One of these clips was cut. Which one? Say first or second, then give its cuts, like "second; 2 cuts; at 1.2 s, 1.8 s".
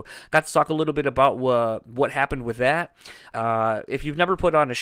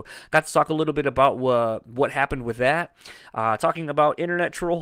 first; 1 cut; at 3.3 s